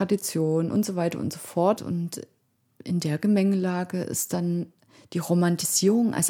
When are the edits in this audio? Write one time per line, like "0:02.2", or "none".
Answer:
0:01.8